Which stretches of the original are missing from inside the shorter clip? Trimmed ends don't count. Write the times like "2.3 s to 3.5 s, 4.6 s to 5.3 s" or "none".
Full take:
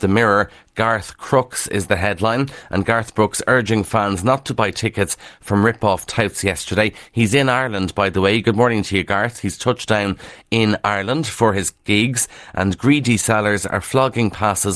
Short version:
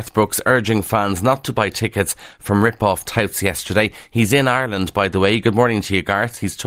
none